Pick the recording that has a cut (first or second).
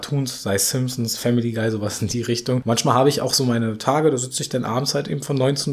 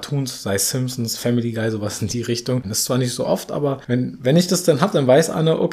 second